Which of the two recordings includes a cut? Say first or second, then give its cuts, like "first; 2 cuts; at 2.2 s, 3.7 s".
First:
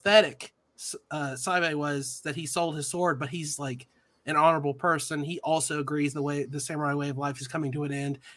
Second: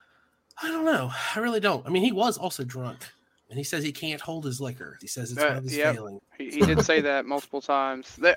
second; 2 cuts; at 5.0 s, 6.2 s